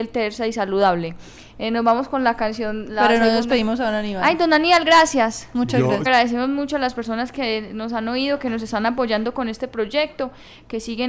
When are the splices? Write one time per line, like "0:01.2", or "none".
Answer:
0:06.1